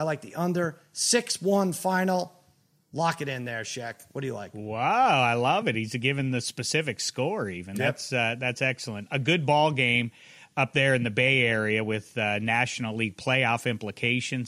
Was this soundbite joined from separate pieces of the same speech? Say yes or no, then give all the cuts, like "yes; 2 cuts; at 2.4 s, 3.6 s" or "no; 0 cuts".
no; 0 cuts